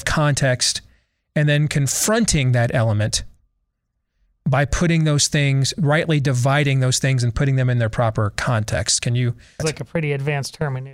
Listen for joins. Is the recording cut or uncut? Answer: cut